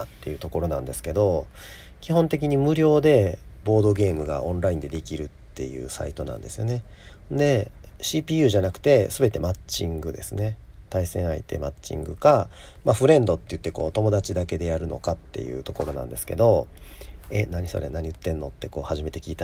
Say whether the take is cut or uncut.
uncut